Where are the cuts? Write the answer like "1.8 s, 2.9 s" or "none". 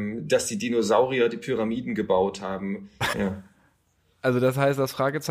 3.1 s